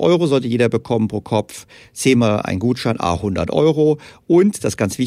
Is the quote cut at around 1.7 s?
no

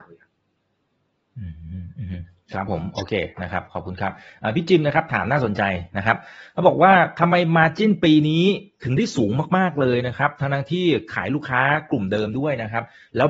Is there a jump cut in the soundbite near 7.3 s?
no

